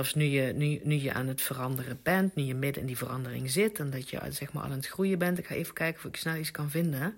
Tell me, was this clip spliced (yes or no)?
no